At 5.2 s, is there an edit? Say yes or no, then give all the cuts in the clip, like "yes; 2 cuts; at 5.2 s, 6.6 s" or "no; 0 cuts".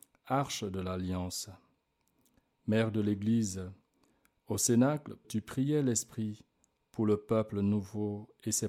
yes; 1 cut; at 5.2 s